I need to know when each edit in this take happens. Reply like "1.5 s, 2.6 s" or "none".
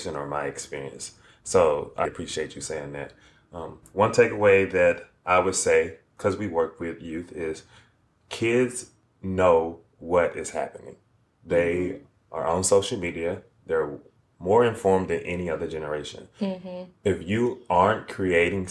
2.0 s